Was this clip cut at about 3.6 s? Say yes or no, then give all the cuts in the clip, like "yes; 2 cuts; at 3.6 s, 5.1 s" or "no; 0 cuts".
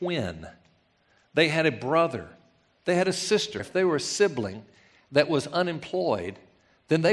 yes; 1 cut; at 3.6 s